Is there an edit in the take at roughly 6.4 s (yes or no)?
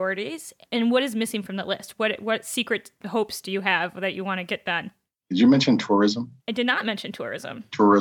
yes